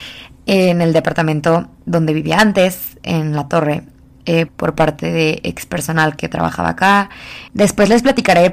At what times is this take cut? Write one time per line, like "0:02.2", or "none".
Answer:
0:04.5
0:07.5